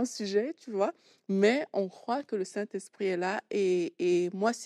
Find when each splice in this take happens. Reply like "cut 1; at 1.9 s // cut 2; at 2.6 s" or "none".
none